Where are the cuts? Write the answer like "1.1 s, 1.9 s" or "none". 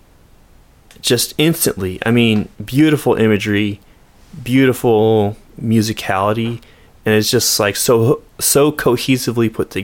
2.5 s